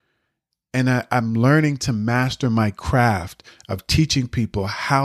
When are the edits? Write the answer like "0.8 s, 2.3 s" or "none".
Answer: none

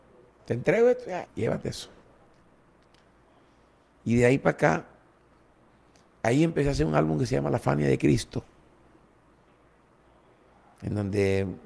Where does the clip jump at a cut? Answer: 1.3 s

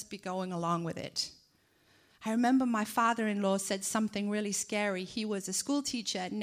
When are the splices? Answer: none

